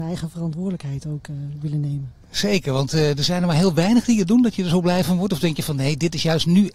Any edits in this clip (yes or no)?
no